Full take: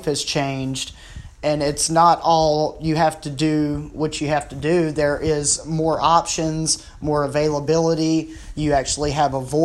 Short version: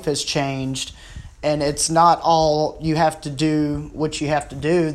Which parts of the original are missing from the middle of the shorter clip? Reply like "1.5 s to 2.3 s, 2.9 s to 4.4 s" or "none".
none